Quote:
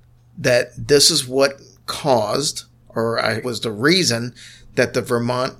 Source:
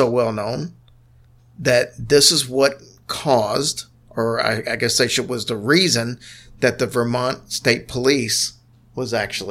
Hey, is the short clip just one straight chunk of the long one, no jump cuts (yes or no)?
no